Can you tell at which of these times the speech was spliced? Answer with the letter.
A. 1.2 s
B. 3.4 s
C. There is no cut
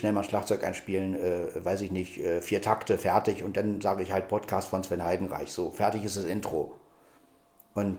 C